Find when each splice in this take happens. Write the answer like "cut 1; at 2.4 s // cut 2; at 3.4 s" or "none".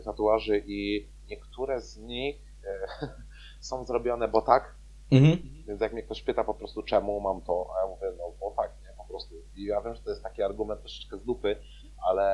none